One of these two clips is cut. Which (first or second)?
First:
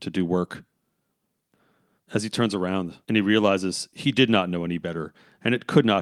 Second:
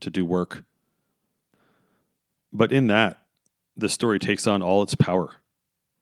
first